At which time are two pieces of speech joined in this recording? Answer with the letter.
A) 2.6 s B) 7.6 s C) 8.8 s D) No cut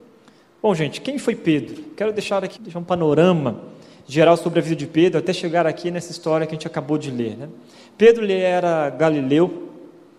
A